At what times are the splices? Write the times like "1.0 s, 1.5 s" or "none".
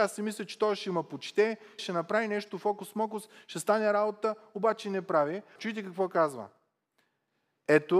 1.8 s, 5.6 s